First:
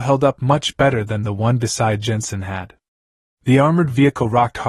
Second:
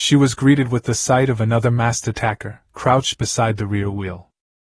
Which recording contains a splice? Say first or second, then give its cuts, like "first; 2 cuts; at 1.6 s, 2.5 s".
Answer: second; 1 cut; at 2.7 s